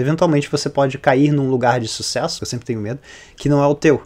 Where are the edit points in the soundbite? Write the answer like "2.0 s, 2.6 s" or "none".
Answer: 2.4 s